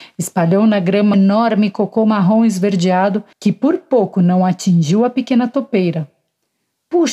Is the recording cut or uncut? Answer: cut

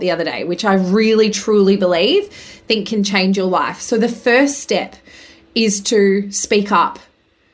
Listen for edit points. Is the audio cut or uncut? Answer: uncut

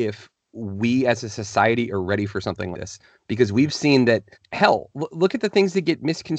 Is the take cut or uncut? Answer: cut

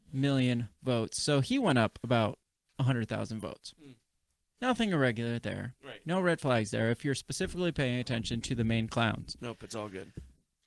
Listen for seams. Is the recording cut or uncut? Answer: uncut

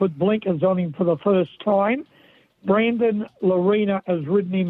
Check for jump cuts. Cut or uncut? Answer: uncut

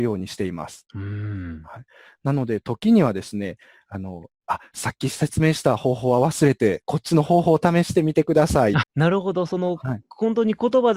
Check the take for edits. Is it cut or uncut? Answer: cut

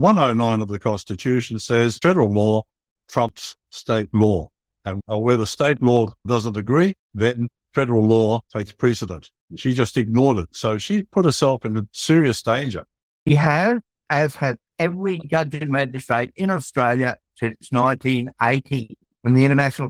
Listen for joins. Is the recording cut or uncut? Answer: uncut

